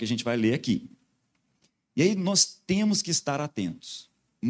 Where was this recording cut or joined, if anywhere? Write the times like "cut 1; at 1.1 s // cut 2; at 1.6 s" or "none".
none